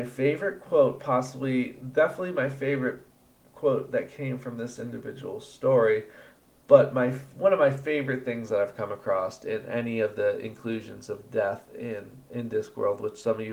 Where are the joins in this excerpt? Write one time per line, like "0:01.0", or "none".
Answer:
none